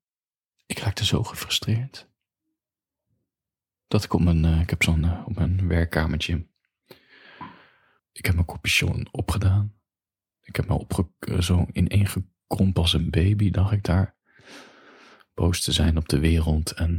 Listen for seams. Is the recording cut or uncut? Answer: cut